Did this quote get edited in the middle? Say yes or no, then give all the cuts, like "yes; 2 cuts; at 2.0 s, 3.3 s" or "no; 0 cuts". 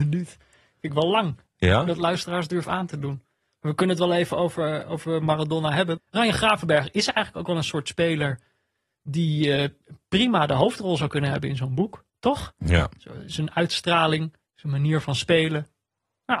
yes; 1 cut; at 6.0 s